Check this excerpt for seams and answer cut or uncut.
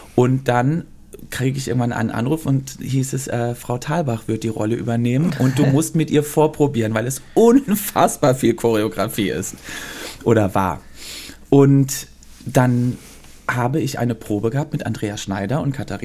uncut